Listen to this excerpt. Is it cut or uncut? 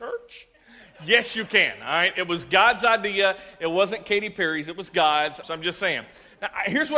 cut